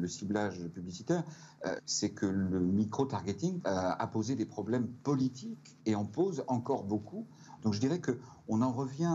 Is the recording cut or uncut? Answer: cut